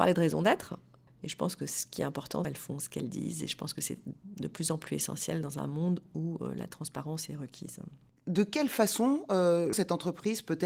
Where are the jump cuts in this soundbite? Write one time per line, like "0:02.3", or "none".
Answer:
0:01.1
0:02.4
0:09.7